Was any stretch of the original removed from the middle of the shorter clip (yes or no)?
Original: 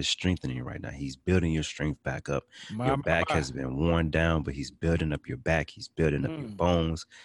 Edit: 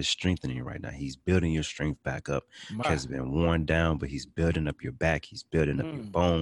yes